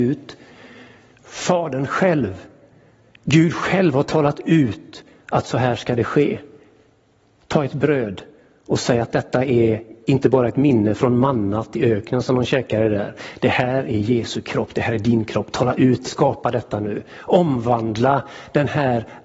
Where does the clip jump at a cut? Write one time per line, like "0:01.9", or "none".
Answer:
0:16.0